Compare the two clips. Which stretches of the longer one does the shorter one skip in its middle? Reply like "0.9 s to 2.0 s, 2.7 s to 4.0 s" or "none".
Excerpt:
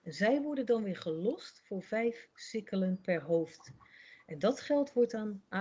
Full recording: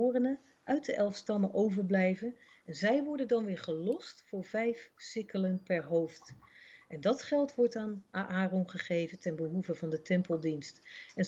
none